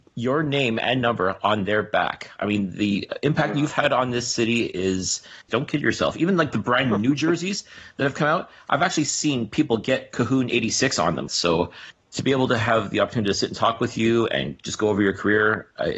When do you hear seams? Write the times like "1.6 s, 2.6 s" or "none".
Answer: 5.5 s, 11.3 s